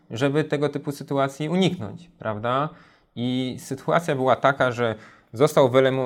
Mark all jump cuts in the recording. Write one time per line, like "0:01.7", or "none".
none